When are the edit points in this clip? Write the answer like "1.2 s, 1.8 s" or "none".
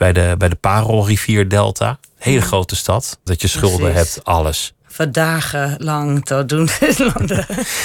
3.3 s